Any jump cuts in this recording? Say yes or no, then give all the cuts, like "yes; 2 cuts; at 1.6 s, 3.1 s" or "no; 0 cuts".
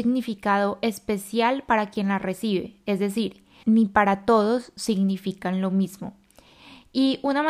yes; 1 cut; at 3.6 s